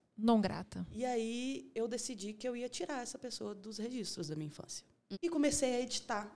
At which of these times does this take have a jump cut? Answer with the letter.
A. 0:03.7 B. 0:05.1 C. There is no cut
B